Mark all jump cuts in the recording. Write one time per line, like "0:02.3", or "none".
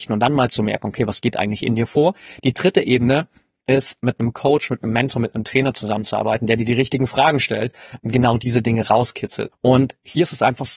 0:09.5